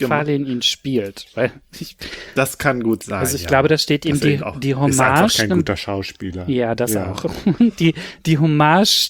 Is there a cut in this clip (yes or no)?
no